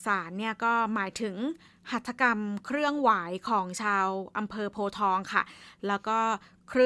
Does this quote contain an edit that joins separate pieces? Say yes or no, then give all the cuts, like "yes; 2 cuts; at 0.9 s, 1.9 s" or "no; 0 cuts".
no; 0 cuts